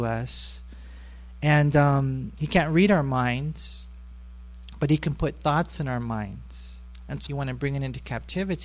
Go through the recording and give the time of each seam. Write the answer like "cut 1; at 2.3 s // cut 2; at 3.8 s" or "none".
cut 1; at 7.3 s